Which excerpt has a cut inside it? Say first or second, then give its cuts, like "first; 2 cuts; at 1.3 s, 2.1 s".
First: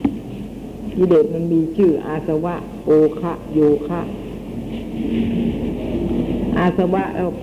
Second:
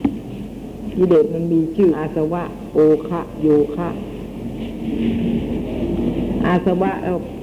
second; 1 cut; at 1.9 s